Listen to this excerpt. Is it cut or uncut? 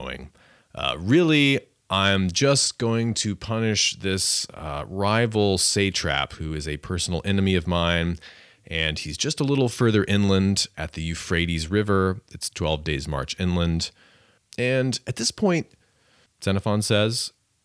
cut